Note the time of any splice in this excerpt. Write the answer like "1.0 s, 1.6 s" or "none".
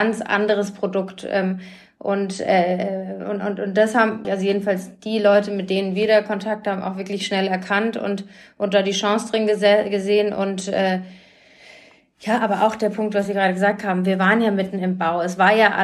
4.2 s

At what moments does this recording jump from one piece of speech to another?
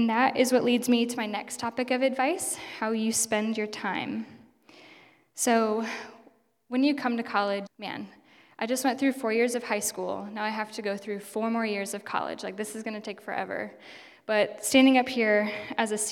7.7 s

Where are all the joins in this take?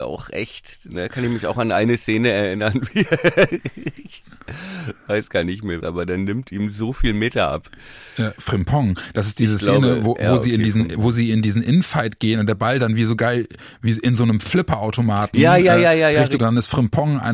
5.8 s, 16.4 s

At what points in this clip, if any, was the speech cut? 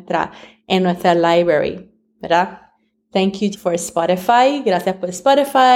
3.5 s

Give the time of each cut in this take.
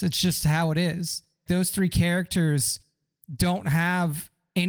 1.5 s

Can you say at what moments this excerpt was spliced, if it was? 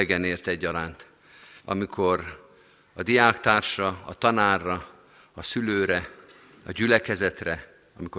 1.6 s

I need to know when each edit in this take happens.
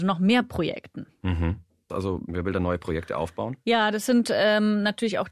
1.9 s

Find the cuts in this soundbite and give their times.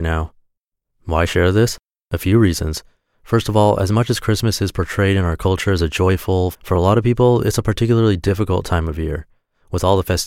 6.5 s

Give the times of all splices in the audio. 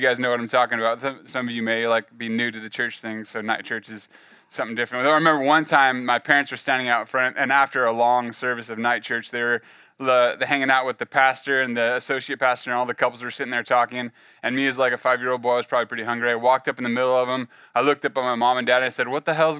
none

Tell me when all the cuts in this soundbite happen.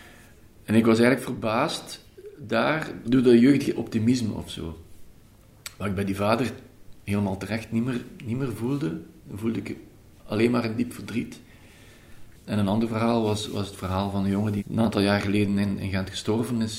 7.0 s, 12.3 s, 14.6 s

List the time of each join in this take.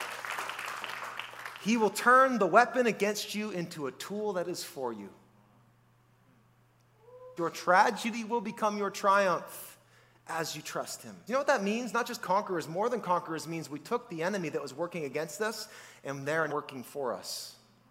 7.4 s, 11.3 s, 16.5 s

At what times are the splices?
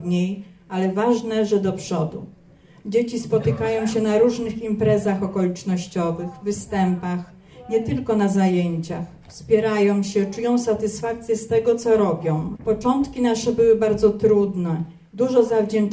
12.5 s

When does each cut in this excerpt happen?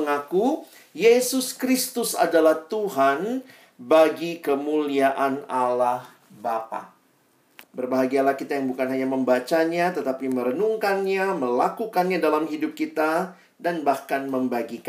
7.6 s

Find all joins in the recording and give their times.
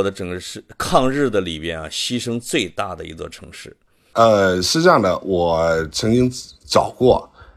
4.1 s

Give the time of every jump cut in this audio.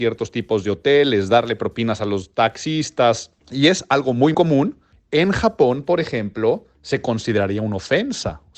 4.3 s

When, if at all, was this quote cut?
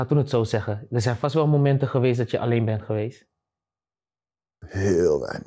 none

